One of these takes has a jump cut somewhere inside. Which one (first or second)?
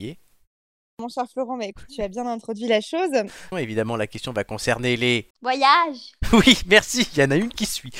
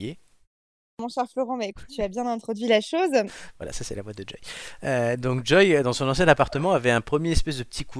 first